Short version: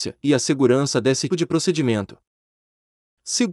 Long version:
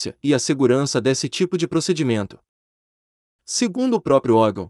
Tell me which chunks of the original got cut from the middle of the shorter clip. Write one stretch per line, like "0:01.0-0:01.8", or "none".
0:01.3-0:01.5